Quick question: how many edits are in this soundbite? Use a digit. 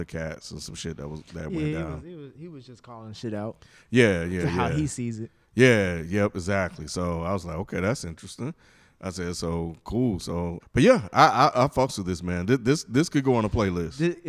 1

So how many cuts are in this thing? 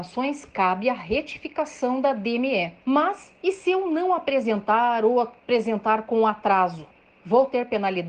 1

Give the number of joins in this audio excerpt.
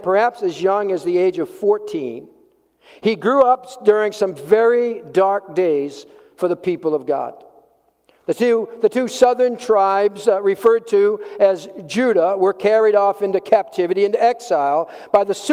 0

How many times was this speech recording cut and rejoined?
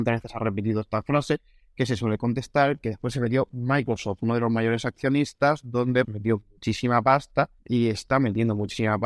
3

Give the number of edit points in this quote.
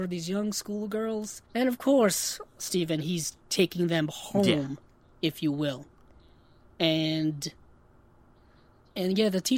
1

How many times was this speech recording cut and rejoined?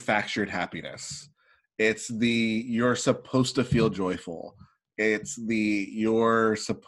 0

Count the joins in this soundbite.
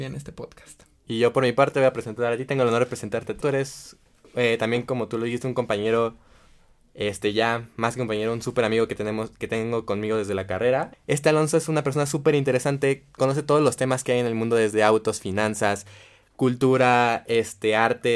2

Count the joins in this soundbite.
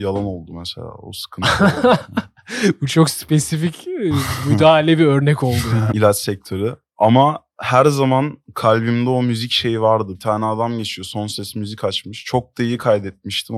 2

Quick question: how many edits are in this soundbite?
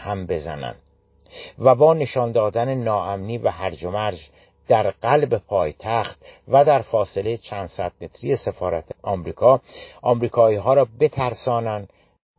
0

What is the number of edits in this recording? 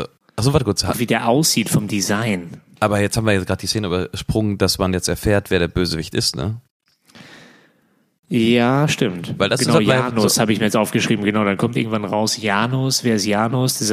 0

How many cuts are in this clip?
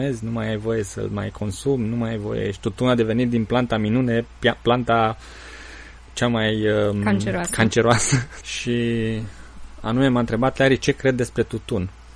1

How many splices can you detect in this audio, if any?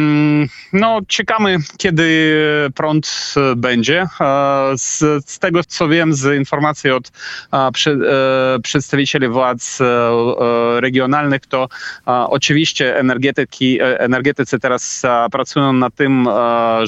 1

